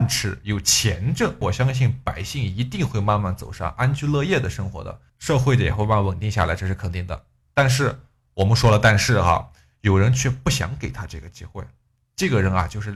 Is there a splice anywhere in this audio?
yes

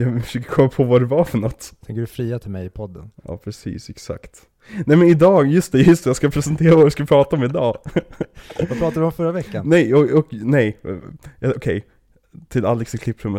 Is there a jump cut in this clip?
no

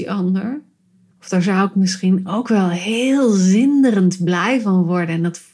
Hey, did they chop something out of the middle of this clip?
yes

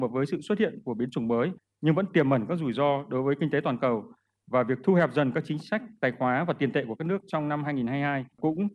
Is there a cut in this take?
no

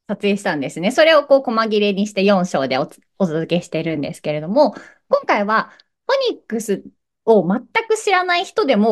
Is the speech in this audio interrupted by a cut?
no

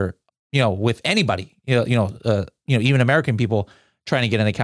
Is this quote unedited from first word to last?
yes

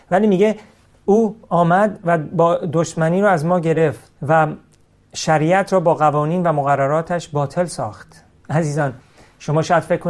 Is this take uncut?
no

